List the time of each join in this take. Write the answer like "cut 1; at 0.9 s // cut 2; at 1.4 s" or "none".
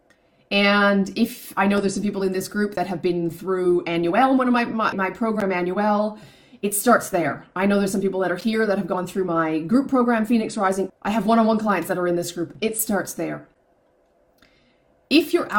cut 1; at 4.9 s // cut 2; at 10.9 s